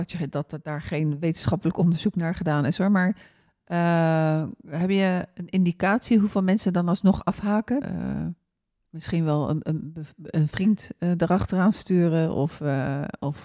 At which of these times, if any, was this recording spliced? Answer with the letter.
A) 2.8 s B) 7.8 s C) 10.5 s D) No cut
B